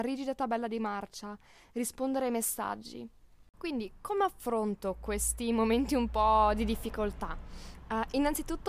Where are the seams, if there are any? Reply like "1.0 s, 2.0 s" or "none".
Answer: none